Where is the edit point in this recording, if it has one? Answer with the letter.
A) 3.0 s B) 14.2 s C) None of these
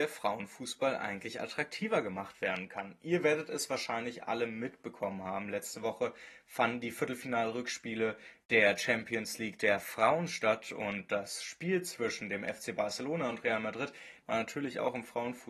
B